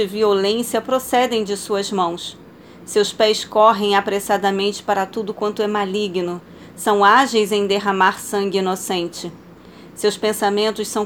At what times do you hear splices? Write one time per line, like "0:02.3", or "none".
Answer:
none